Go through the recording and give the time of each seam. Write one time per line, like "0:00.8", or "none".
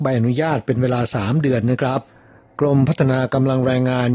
none